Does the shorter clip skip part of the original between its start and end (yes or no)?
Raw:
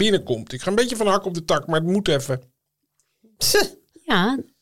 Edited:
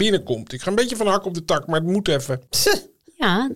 yes